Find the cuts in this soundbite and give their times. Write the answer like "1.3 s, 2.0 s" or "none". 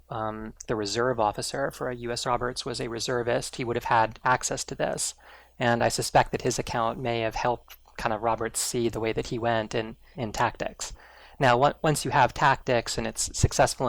2.2 s, 10.1 s